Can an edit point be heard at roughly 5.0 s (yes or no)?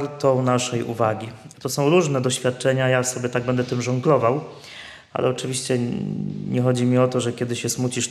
no